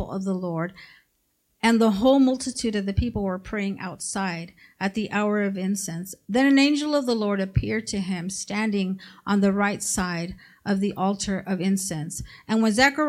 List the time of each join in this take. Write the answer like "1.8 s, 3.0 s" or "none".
none